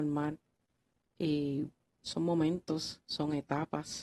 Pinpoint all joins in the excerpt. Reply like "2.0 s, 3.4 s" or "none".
none

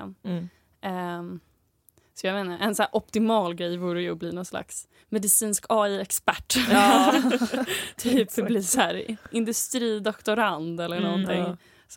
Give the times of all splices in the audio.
none

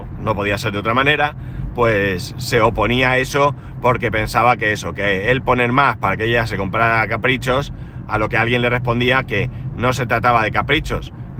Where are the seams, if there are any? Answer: none

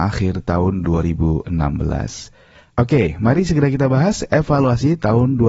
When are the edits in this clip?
2.7 s

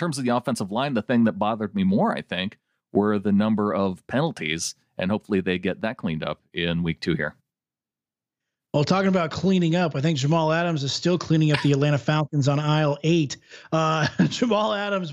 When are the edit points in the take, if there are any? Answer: none

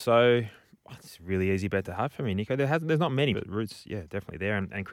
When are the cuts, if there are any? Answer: 3.3 s

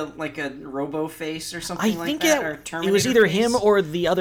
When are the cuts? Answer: none

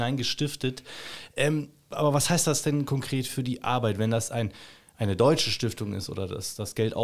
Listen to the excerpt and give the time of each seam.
1.9 s

